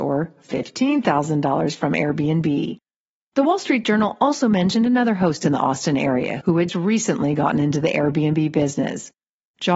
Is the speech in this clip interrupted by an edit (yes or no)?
yes